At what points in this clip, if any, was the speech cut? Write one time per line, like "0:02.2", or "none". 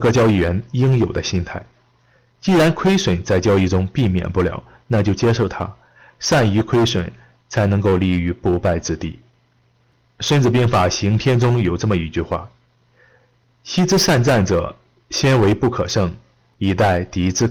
none